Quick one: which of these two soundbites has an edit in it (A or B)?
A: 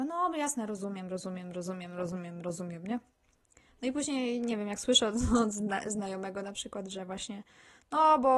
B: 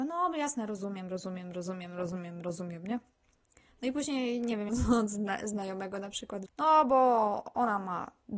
B